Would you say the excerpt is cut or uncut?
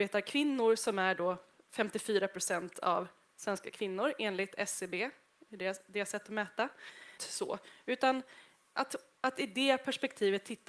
cut